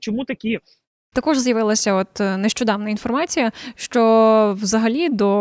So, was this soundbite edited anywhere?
yes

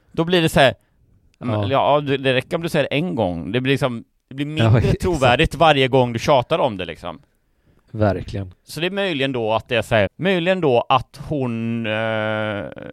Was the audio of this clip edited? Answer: yes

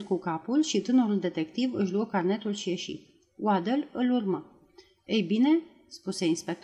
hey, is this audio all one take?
yes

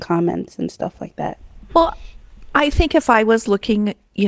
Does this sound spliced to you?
yes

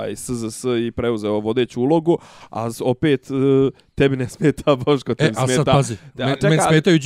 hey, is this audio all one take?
yes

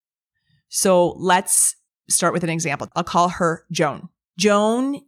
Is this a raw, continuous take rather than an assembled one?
no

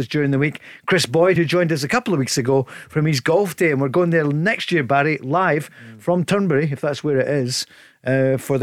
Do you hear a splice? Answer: no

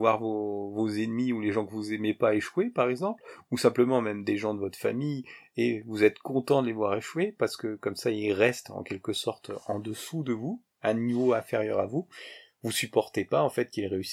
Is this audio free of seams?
no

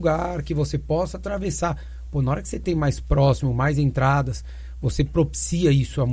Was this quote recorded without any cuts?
yes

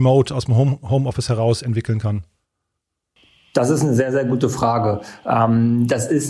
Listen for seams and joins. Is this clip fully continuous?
yes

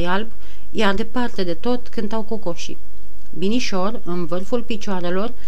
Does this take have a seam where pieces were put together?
yes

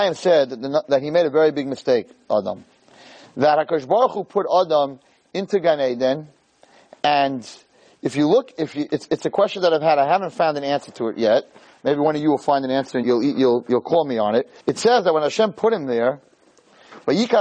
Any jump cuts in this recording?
yes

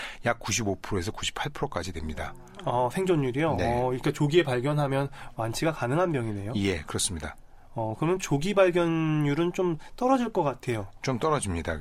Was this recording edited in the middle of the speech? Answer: no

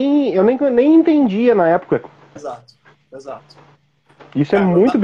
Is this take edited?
yes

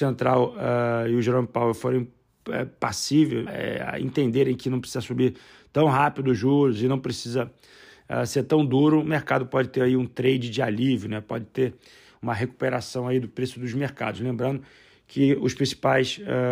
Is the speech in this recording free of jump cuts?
no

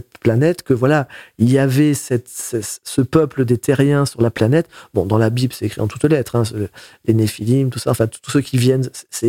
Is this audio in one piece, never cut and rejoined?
yes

